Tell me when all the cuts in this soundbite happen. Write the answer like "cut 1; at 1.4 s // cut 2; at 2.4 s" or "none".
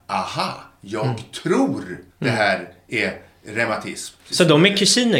cut 1; at 2.1 s // cut 2; at 4.2 s